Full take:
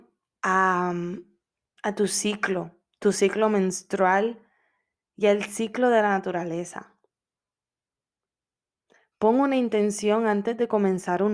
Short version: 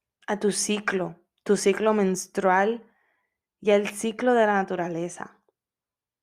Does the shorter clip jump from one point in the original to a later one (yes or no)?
no